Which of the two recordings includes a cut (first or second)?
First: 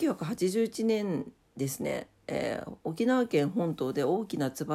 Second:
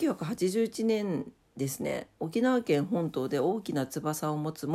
second